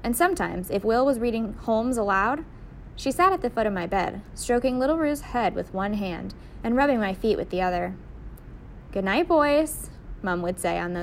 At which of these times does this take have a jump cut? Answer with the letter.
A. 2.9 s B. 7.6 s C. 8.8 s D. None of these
D